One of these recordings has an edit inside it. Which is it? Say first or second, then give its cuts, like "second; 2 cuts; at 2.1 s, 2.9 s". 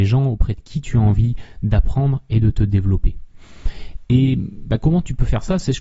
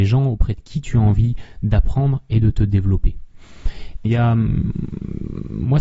second; 1 cut; at 4.1 s